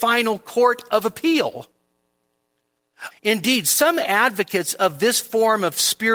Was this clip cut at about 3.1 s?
yes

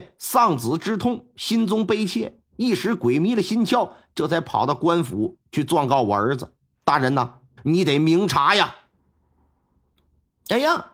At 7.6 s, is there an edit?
yes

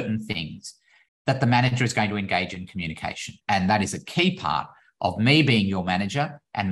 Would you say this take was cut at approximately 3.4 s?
yes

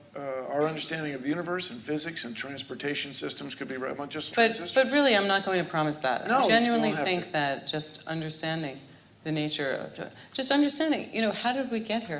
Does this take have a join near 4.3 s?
yes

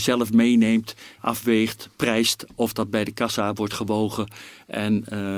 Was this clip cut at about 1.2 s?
yes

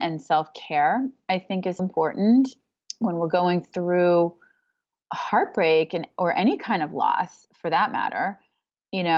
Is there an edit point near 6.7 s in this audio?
no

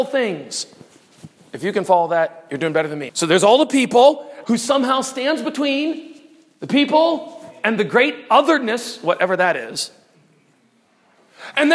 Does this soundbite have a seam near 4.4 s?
yes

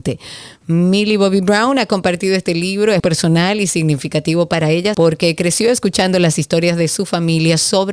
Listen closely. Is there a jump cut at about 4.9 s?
yes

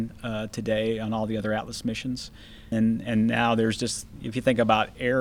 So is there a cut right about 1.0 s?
no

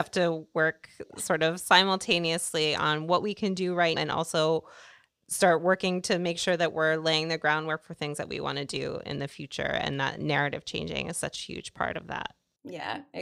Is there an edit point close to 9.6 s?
no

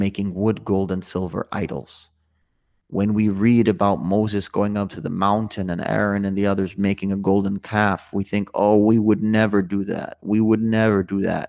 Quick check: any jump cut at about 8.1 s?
no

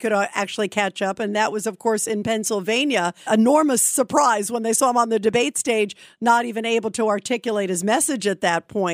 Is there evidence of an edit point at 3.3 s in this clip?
yes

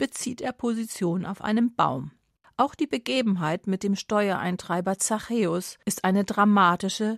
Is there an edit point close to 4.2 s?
no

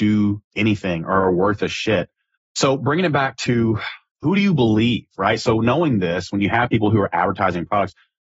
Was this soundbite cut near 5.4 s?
no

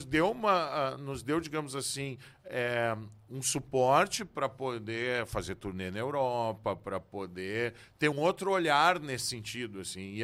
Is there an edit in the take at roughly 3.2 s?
no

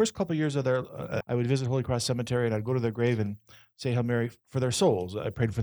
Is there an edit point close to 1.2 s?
yes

